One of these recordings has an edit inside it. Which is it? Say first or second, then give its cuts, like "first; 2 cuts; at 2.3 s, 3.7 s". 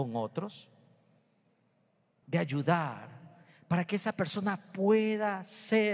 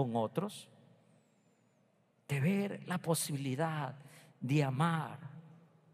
first; 1 cut; at 2.2 s